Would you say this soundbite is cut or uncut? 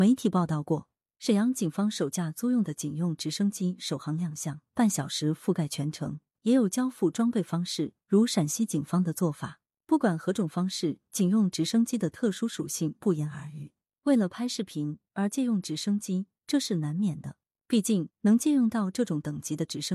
cut